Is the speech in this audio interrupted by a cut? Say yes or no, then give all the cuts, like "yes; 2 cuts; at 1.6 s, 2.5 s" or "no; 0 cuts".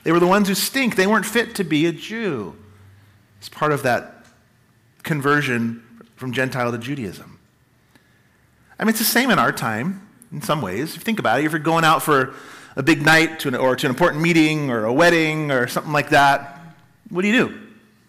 no; 0 cuts